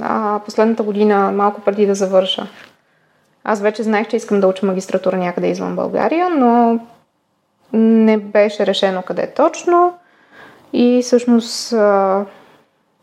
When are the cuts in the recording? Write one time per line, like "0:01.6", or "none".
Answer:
none